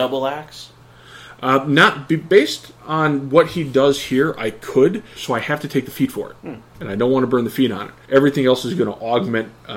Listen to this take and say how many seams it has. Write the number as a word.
three